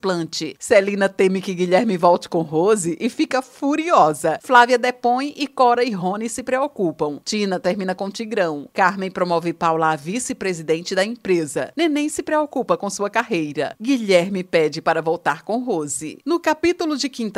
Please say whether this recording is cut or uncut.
uncut